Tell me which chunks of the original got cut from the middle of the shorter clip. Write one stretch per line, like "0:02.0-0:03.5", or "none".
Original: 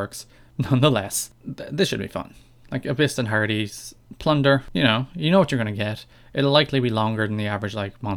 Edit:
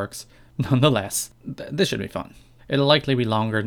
0:02.6-0:06.2